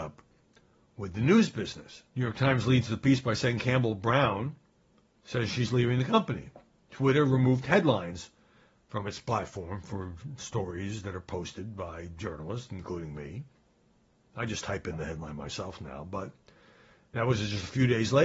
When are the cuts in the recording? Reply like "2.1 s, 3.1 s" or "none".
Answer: 2.1 s, 5.2 s